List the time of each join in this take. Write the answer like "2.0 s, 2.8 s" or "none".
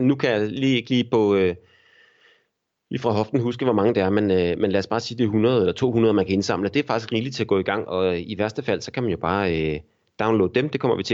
7.8 s